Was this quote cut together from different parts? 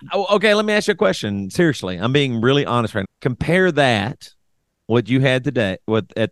yes; 1 cut; at 3.0 s

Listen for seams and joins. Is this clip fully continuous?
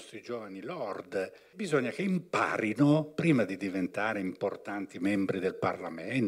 no; 1 cut; at 1.5 s

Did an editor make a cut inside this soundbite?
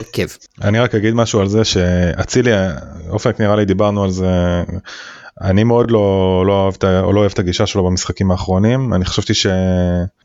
no; 0 cuts

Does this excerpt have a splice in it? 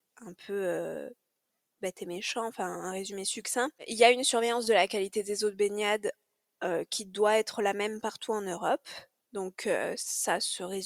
yes; 1 cut; at 9.2 s

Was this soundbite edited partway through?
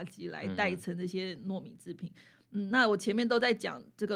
no; 0 cuts

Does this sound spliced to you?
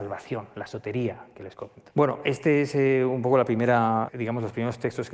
yes; 2 cuts; at 1.9 s, 4.1 s

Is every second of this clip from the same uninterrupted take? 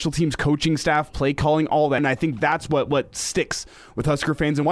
no; 1 cut; at 2.0 s

